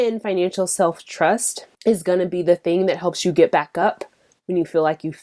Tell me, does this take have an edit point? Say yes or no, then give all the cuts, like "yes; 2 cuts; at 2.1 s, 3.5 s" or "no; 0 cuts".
yes; 1 cut; at 1.7 s